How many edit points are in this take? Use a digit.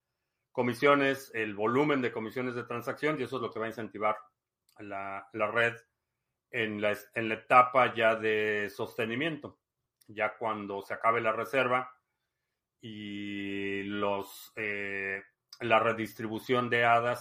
0